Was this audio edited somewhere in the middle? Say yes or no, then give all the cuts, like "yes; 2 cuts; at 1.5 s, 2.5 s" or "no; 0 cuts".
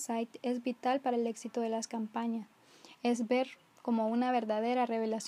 no; 0 cuts